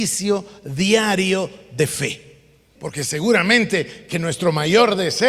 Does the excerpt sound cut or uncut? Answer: cut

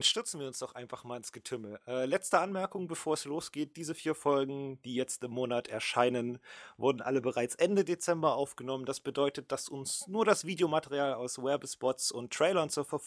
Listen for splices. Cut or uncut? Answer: uncut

